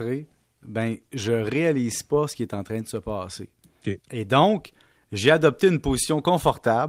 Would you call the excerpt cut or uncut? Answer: uncut